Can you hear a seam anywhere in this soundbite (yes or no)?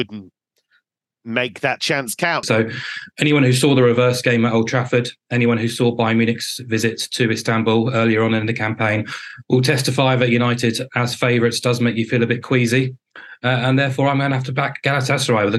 yes